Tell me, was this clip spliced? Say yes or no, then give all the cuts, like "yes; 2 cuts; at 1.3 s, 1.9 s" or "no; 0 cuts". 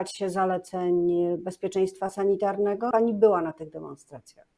yes; 1 cut; at 2.9 s